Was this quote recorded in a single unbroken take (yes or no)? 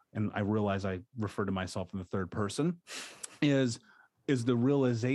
yes